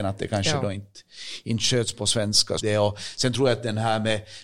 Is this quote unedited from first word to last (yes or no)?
no